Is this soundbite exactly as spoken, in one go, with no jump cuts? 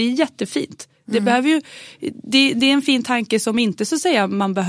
yes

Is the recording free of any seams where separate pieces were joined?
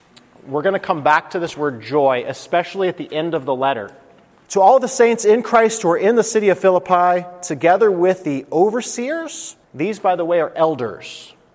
no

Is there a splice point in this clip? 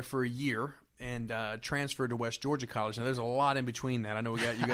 no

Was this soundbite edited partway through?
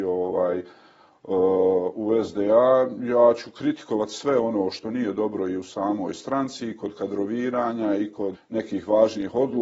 yes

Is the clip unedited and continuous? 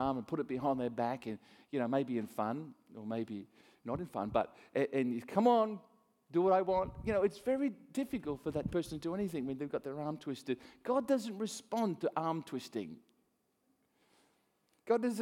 yes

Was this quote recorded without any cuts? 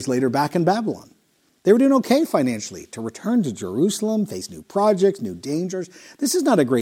yes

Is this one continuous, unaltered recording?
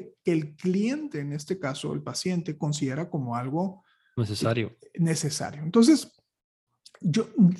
yes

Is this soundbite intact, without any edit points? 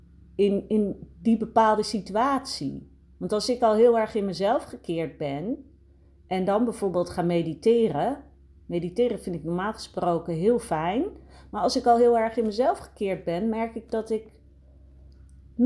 yes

